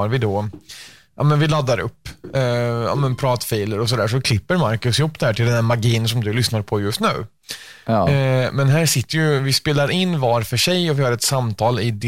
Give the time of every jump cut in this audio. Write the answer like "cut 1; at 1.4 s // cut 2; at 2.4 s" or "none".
none